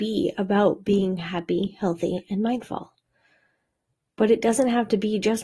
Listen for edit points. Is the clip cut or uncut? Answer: uncut